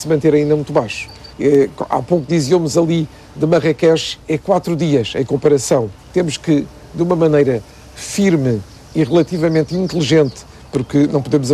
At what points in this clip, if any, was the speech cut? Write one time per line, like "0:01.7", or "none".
0:01.3
0:04.2
0:06.0